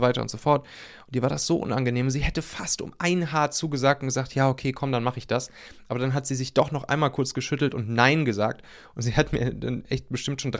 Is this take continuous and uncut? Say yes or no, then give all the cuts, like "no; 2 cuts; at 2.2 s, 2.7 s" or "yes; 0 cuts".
yes; 0 cuts